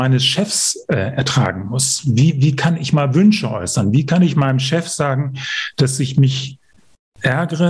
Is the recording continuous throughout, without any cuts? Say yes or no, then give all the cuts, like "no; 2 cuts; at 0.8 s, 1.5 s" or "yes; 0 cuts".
yes; 0 cuts